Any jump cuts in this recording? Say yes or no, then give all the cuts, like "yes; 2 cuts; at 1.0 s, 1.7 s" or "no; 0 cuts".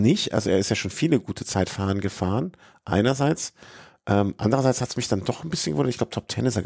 no; 0 cuts